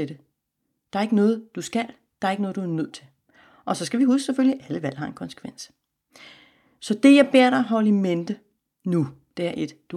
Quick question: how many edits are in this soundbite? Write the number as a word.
zero